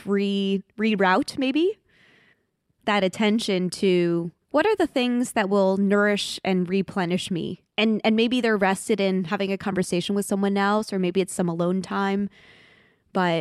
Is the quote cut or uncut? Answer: cut